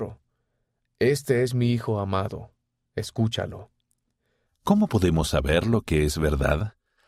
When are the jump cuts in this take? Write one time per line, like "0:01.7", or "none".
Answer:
0:04.5